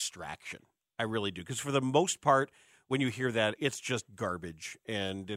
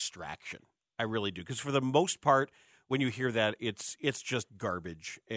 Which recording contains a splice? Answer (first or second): first